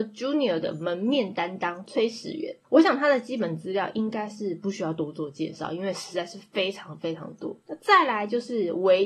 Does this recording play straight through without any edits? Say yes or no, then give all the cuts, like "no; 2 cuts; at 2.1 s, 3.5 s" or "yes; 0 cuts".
no; 2 cuts; at 2.6 s, 7.6 s